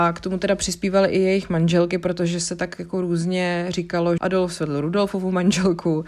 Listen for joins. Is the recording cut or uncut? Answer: cut